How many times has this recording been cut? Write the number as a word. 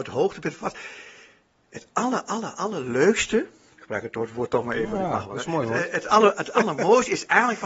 zero